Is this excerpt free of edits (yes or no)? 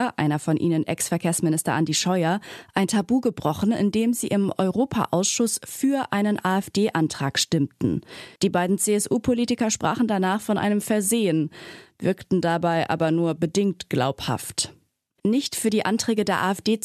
no